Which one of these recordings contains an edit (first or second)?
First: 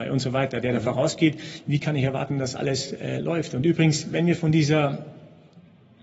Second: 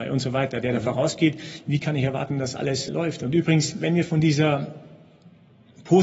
second